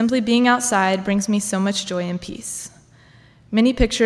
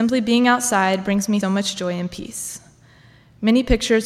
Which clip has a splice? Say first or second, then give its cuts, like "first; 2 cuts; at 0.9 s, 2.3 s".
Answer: second; 1 cut; at 1.4 s